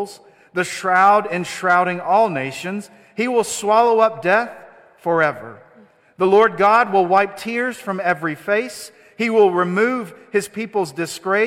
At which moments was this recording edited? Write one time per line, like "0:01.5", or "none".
none